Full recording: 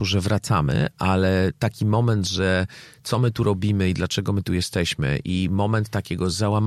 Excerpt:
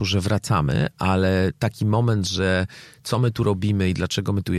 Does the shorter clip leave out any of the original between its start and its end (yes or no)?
no